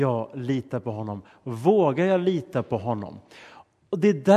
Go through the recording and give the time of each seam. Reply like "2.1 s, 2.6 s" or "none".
none